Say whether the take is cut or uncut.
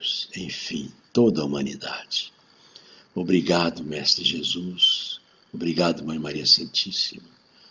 uncut